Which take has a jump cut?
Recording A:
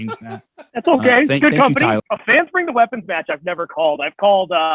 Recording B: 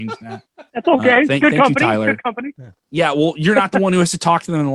A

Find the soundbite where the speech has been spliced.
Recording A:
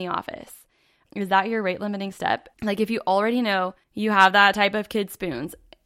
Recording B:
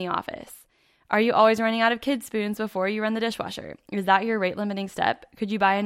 A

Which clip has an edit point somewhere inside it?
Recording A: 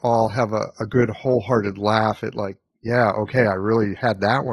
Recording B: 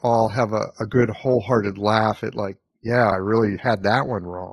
B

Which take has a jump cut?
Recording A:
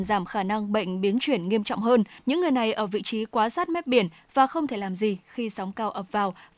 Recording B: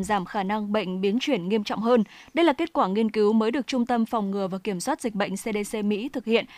A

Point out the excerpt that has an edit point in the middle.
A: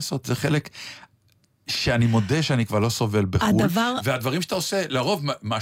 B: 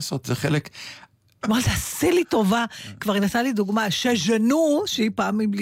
B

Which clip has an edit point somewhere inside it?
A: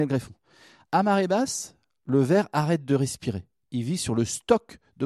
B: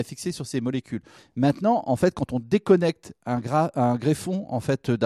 B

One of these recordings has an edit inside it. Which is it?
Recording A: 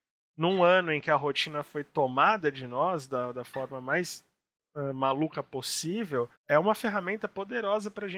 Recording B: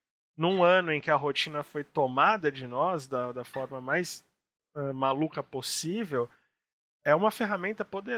A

